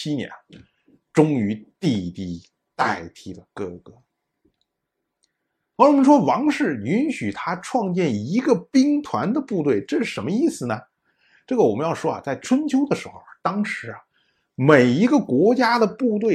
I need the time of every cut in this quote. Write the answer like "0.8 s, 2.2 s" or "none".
none